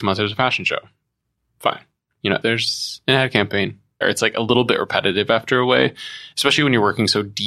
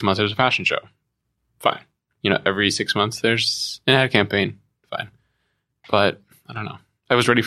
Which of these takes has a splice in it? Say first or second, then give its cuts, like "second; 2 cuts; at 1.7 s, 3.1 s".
first; 2 cuts; at 2.4 s, 4.0 s